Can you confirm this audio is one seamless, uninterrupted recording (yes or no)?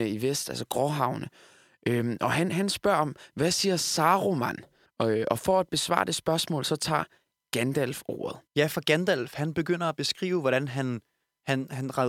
no